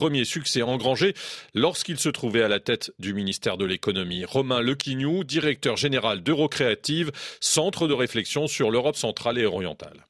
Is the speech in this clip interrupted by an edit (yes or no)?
no